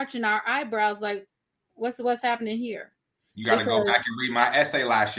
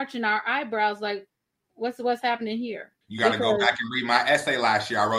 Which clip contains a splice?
second; 1 cut; at 3.0 s

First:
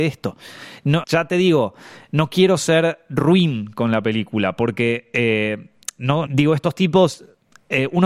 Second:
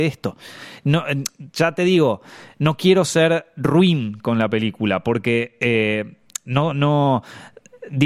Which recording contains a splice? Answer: first; 2 cuts; at 1.0 s, 6.3 s

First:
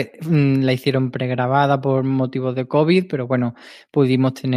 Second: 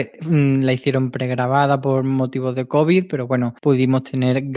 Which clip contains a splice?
second; 1 cut; at 3.6 s

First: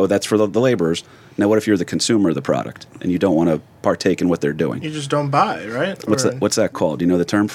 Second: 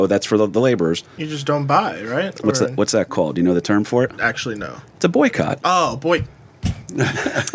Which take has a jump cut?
second; 1 cut; at 1.2 s

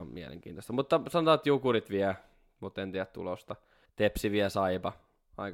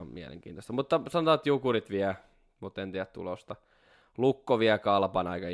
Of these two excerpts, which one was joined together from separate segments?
first; 1 cut; at 3.9 s

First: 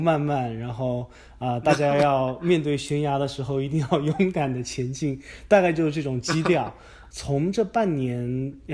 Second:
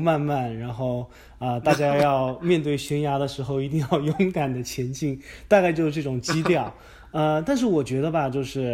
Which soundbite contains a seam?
first; 1 cut; at 7.1 s

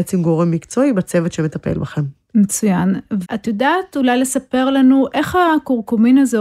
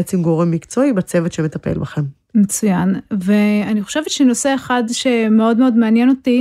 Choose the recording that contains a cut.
first; 1 cut; at 3.2 s

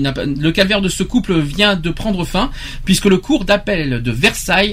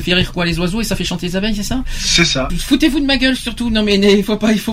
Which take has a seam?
second; 1 cut; at 2.5 s

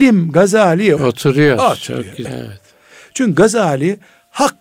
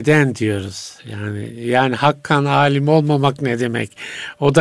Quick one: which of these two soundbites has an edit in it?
first; 2 cuts; at 1.0 s, 2.2 s

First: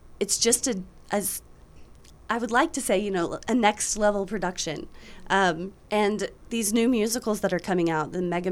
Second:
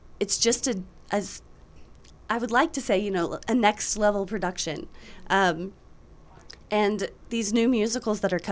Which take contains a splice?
first; 1 cut; at 5.8 s

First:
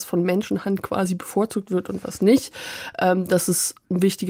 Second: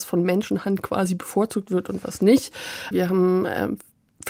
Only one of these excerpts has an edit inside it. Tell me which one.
second; 1 cut; at 2.9 s

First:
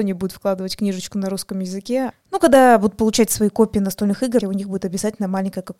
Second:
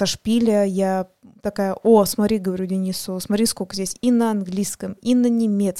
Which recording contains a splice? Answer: first; 2 cuts; at 2.1 s, 4.4 s

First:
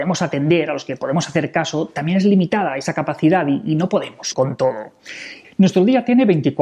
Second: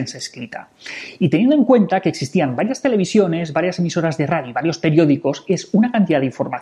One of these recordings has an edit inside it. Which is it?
first; 2 cuts; at 4.3 s, 5.4 s

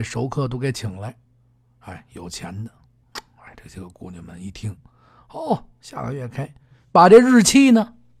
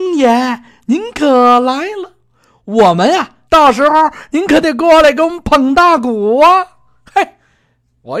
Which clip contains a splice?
second; 1 cut; at 3.5 s

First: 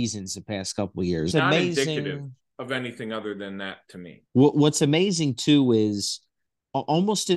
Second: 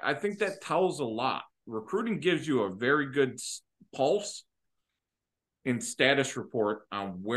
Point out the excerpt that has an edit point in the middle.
first; 2 cuts; at 1.3 s, 4.3 s

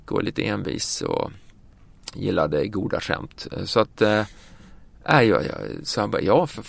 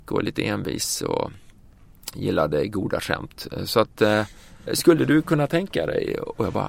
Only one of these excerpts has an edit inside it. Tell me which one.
second; 1 cut; at 4.7 s

